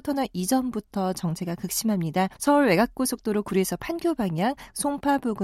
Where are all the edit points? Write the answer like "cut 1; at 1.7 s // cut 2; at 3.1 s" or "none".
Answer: cut 1; at 2.4 s